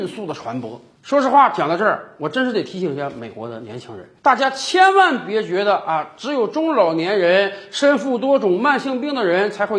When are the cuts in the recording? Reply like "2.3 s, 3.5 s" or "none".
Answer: 4.2 s

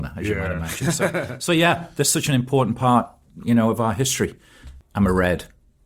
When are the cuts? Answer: 4.8 s

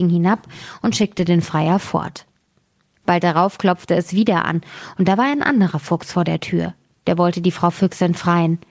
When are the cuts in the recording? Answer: none

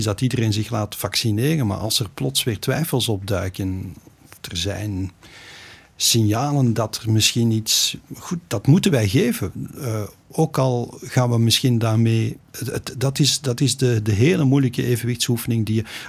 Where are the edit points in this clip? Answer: none

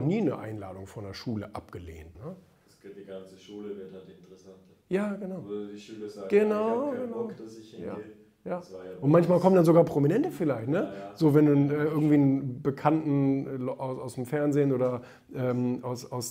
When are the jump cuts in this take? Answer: 2.1 s

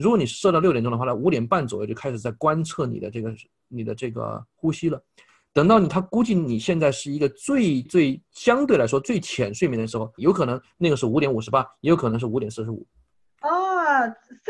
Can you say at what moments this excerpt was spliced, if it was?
7.9 s, 10.2 s

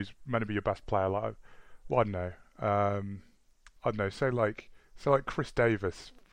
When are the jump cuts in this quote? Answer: 3.8 s

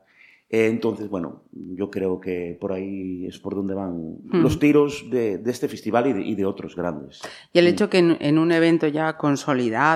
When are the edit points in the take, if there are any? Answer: none

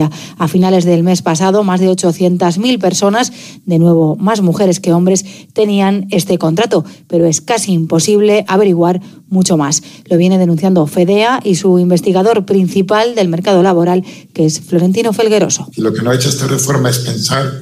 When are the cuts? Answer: none

